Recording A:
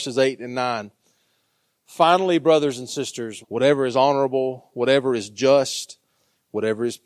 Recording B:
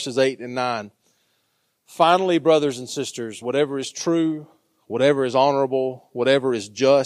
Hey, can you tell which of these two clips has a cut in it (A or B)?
A